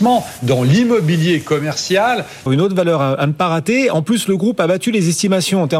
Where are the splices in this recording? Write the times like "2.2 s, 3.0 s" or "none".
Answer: 2.5 s